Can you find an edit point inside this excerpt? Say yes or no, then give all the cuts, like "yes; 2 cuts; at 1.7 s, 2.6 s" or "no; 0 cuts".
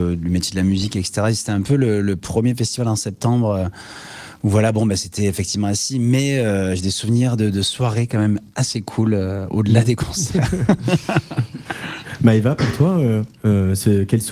no; 0 cuts